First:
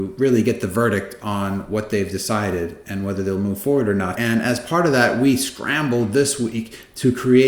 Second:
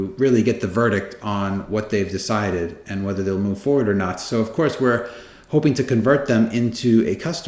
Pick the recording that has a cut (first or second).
first